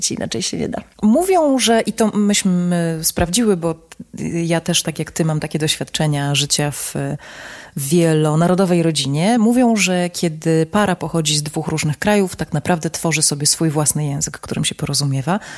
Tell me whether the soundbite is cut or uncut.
uncut